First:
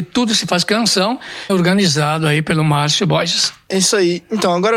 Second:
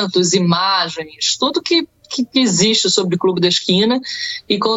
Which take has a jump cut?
first; 1 cut; at 1.5 s

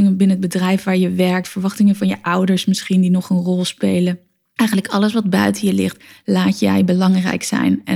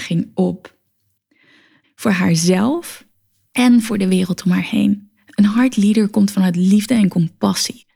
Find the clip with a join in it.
second; 1 cut; at 1.8 s

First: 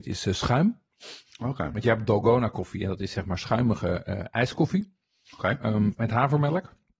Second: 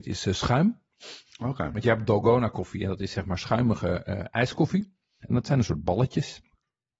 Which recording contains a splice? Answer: second; 1 cut; at 5.2 s

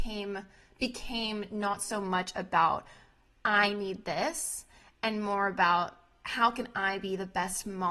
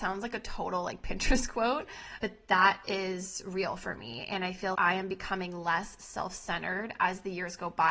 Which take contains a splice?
second; 2 cuts; at 2.2 s, 4.7 s

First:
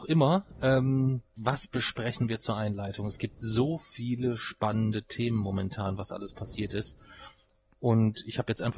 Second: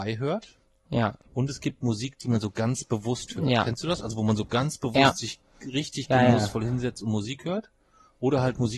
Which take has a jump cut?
first; 1 cut; at 1.4 s

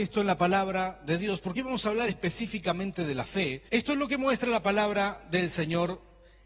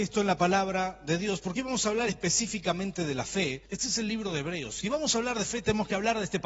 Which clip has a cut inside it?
second; 1 cut; at 3.7 s

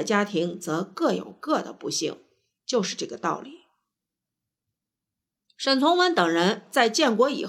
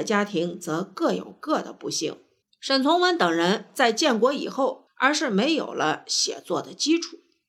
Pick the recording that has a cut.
second; 2 cuts; at 2.4 s, 4.9 s

